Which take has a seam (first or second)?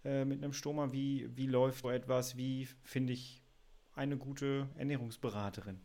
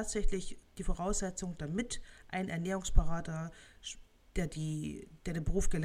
first